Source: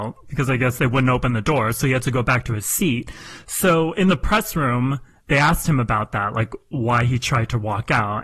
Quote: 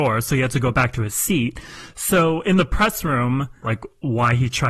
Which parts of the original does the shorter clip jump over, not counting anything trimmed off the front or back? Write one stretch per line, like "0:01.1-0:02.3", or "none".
0:05.1-0:06.3